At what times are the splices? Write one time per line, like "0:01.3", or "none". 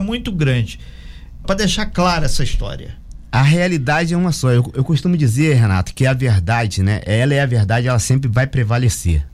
0:01.4